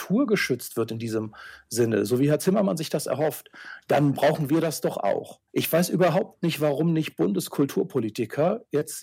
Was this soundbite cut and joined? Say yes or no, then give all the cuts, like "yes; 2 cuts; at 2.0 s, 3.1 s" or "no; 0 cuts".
yes; 1 cut; at 5.5 s